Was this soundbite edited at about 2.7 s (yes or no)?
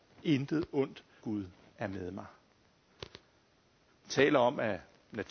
no